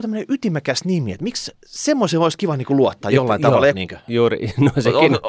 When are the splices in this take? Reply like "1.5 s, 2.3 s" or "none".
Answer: 1.6 s, 3.7 s